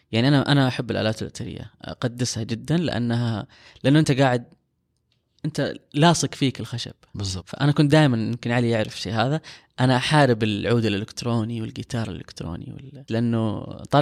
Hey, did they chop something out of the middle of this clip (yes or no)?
yes